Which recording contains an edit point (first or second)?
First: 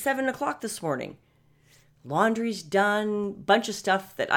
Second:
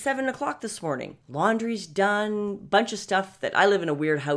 second